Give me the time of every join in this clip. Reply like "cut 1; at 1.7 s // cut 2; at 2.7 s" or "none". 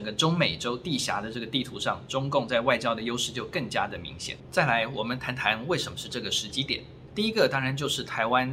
cut 1; at 7.1 s